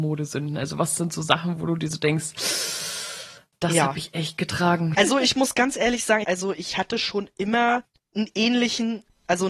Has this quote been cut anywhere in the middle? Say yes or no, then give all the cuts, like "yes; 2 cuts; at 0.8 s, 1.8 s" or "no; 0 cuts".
yes; 2 cuts; at 4.9 s, 6.2 s